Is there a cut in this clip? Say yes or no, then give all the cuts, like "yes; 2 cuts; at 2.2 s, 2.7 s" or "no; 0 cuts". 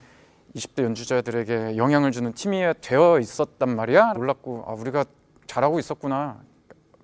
yes; 1 cut; at 4.1 s